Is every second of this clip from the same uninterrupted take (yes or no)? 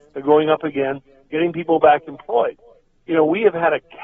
yes